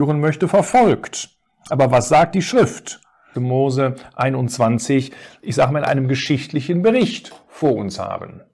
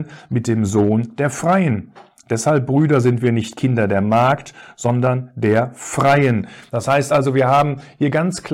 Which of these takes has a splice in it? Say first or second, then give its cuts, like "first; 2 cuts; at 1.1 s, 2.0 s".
first; 1 cut; at 3.3 s